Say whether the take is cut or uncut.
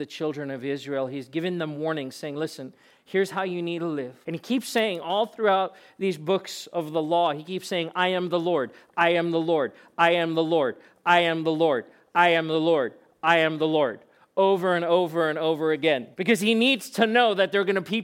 cut